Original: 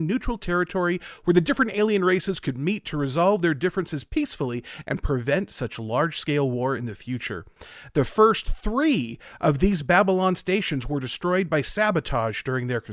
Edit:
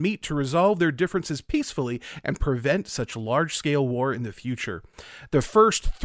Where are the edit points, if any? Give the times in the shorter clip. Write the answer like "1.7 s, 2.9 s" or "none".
none